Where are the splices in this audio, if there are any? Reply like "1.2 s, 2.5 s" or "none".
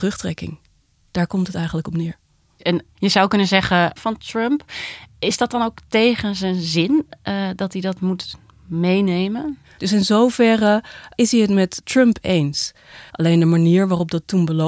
4.0 s, 9.8 s, 13.1 s